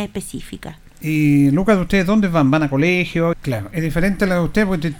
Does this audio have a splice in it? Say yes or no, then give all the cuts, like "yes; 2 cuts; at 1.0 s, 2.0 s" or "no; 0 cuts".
yes; 1 cut; at 3.3 s